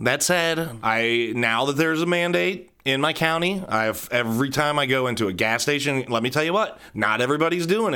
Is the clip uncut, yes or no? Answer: yes